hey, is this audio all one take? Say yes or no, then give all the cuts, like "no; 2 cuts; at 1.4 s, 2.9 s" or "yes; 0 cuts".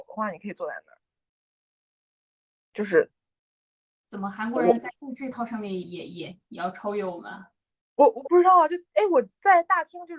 no; 1 cut; at 5.8 s